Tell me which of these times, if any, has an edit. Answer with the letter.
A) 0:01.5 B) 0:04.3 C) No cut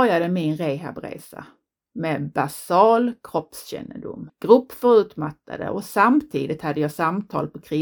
B